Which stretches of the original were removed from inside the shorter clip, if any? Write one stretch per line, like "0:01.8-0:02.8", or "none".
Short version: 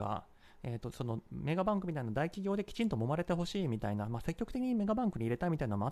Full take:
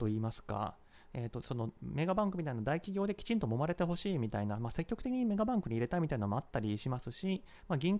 none

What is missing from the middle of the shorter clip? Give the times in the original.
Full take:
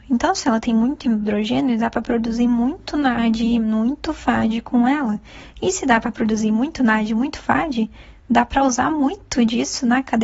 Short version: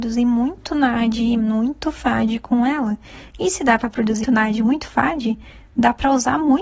0:06.4-0:06.7

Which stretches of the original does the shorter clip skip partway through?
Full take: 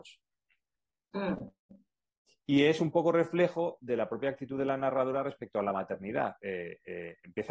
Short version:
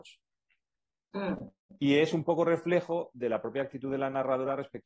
0:01.8-0:02.4

